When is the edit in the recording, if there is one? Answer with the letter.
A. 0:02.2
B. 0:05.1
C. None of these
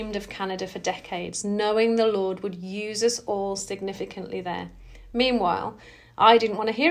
C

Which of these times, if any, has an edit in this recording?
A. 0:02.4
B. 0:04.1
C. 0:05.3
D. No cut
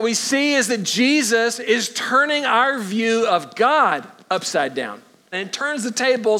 C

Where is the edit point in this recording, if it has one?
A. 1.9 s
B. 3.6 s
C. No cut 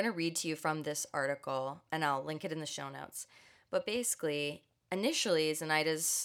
A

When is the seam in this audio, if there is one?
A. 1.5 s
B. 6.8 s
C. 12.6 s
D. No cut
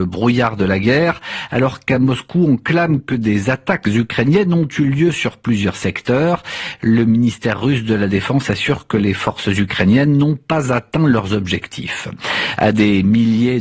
D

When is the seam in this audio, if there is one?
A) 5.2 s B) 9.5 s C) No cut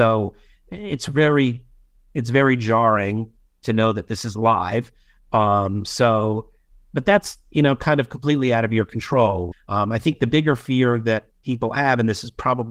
B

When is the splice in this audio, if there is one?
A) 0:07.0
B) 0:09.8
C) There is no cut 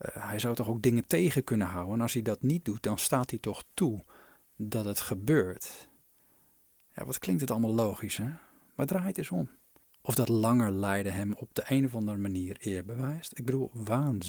B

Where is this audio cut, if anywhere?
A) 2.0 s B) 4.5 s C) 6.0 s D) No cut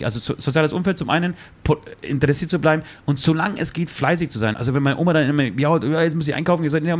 B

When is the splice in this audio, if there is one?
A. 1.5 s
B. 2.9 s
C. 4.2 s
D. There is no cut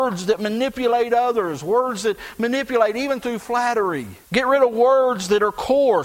C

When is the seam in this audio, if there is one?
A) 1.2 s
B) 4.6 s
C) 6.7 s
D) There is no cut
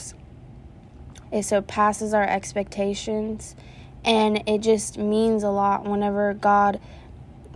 A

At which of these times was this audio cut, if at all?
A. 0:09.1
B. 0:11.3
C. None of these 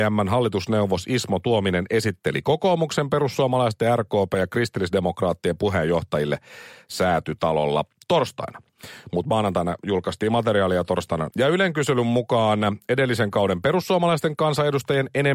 B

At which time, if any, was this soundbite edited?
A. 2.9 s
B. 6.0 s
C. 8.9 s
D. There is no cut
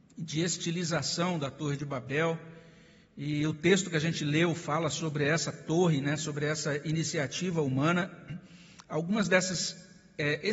D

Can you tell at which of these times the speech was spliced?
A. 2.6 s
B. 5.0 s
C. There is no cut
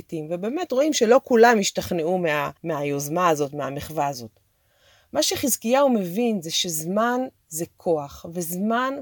A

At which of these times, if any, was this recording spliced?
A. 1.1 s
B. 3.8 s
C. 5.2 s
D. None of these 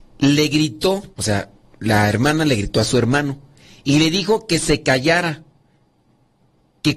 A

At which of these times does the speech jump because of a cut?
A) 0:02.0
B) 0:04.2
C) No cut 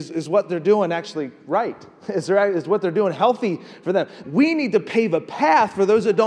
B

